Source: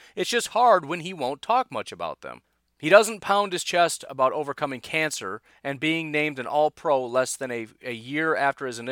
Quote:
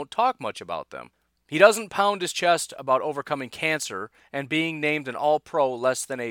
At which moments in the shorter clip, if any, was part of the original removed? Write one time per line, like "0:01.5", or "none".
none